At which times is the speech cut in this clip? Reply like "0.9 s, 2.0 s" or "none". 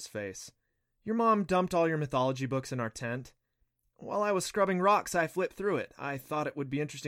none